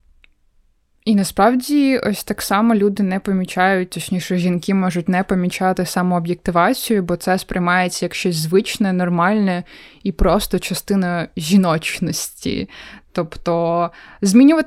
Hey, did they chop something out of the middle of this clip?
no; 0 cuts

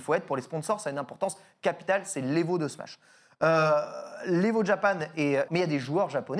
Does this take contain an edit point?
yes; 1 cut; at 5.5 s

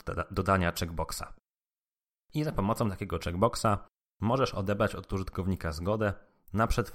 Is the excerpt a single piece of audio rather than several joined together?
yes; 0 cuts

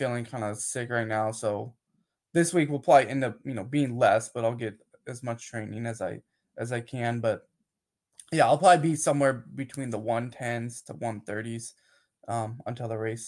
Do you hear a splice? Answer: no; 0 cuts

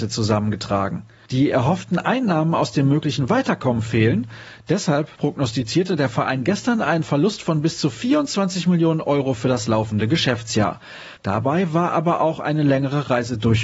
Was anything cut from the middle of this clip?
yes; 2 cuts; at 1.3 s, 11.2 s

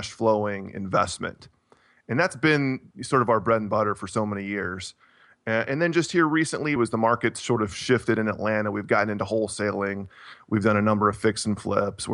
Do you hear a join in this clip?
yes; 1 cut; at 6.8 s

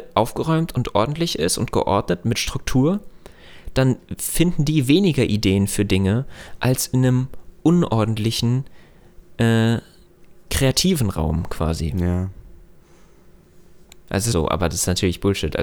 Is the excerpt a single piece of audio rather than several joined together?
no; 1 cut; at 14.3 s

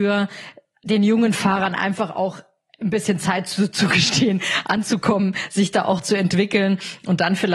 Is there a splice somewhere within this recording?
no; 0 cuts

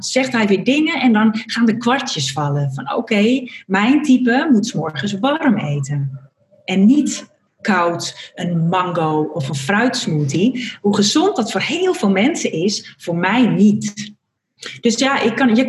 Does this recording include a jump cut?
no; 0 cuts

